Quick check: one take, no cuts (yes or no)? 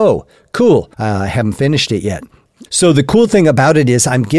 no